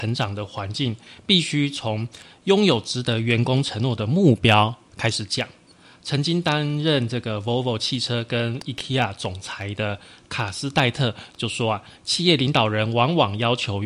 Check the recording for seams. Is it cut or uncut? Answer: uncut